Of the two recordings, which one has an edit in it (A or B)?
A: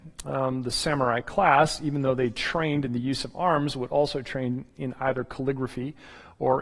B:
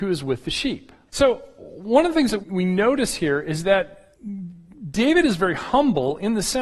B